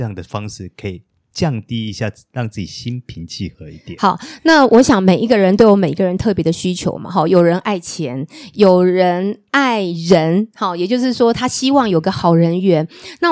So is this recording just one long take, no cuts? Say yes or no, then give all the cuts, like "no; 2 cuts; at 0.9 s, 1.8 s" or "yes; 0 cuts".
yes; 0 cuts